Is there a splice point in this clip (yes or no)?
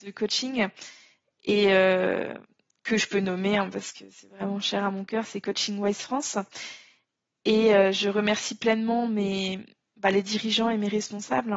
no